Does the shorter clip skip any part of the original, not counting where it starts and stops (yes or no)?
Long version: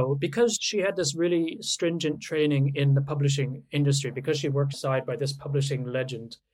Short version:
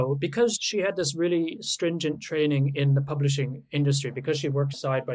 no